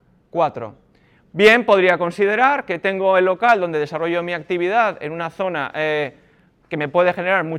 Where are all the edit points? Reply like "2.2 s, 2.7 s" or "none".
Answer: none